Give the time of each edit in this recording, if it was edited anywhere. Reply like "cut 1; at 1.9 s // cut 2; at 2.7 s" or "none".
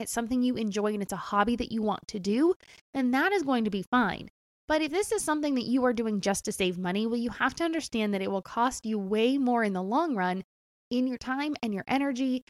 none